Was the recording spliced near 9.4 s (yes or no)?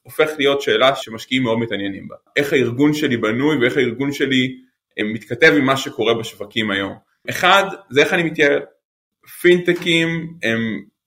no